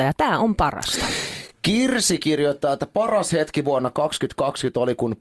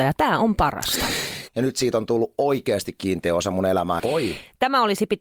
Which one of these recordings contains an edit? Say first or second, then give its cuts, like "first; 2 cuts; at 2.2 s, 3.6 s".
second; 2 cuts; at 1.5 s, 4.0 s